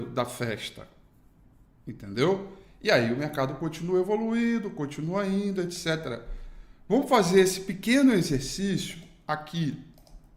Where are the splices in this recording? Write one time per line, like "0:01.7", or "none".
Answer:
none